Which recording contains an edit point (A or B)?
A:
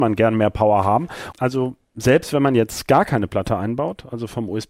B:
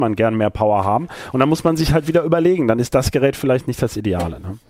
A